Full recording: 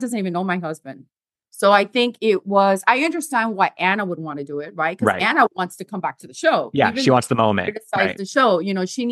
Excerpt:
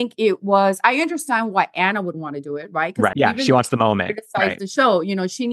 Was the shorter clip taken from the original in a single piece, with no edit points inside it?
no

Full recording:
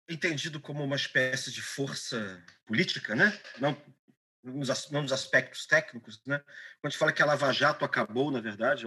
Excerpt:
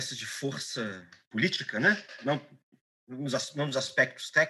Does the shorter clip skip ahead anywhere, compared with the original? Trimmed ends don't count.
no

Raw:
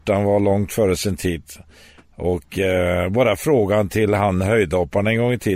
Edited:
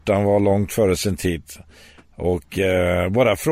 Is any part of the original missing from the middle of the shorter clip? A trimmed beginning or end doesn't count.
no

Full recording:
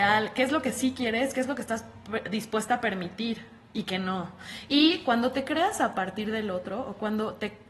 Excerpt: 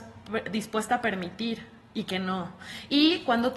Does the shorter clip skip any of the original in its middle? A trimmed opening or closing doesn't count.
no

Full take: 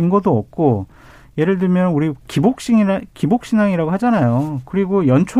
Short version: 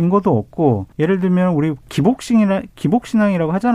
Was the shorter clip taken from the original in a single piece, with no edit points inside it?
no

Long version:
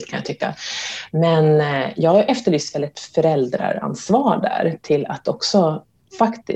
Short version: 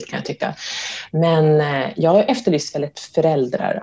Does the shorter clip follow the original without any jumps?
yes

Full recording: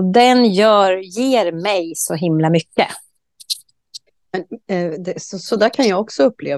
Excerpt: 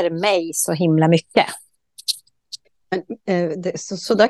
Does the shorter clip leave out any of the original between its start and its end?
no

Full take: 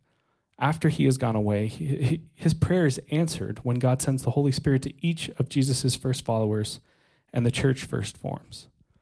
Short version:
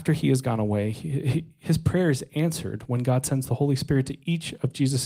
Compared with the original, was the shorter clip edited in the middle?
no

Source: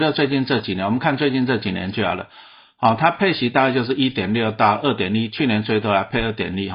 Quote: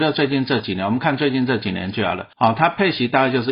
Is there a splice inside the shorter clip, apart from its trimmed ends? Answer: yes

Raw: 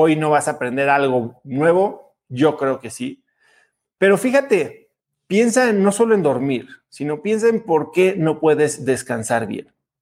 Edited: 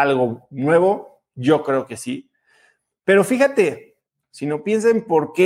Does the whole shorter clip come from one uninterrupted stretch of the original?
no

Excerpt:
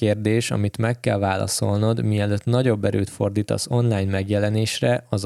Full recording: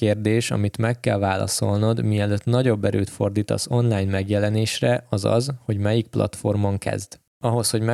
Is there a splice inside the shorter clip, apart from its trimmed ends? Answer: no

